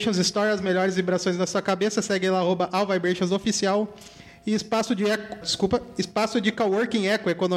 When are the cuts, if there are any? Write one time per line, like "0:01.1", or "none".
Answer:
0:05.4